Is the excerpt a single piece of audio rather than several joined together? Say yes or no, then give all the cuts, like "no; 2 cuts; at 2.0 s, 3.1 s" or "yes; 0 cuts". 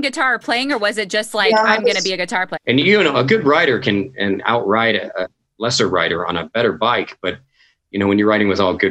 no; 2 cuts; at 2.6 s, 5.2 s